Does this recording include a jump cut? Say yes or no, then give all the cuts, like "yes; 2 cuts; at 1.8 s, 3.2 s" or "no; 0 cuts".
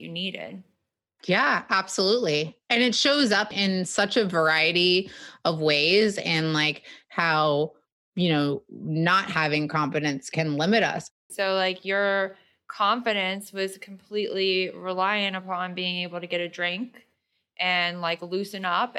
yes; 1 cut; at 11.3 s